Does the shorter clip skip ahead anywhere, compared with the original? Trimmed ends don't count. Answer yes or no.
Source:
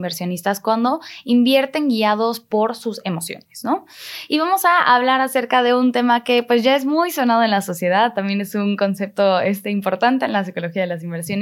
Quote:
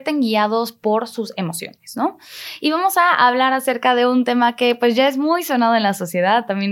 no